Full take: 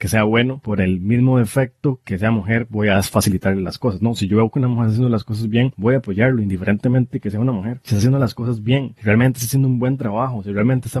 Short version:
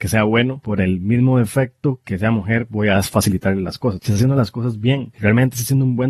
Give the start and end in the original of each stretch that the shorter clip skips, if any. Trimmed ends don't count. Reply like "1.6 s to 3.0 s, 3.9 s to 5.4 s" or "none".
4.0 s to 7.8 s